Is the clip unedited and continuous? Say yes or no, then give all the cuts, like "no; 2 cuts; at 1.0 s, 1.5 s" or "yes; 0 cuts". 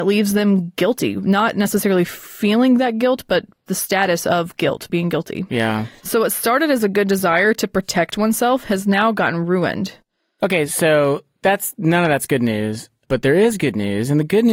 yes; 0 cuts